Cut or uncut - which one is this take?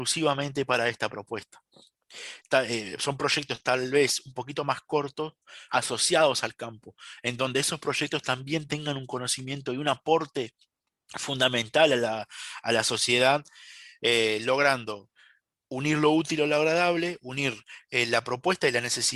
cut